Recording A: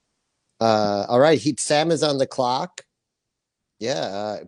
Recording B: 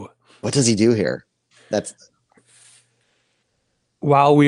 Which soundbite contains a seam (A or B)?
A